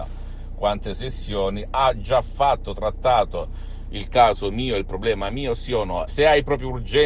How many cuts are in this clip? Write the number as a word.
one